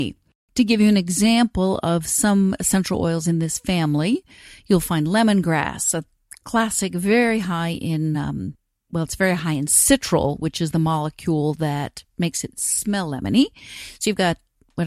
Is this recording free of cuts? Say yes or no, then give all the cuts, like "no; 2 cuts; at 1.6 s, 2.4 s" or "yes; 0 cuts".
yes; 0 cuts